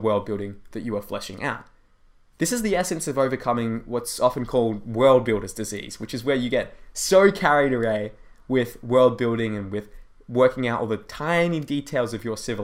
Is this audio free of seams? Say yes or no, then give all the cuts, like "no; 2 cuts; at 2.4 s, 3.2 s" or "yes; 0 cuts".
yes; 0 cuts